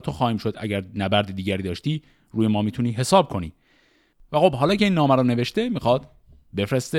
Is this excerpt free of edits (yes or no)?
yes